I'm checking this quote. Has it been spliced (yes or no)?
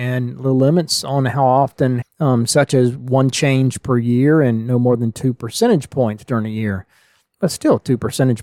yes